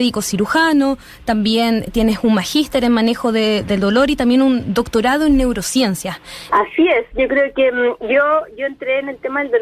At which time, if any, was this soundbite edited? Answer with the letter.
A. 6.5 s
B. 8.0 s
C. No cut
A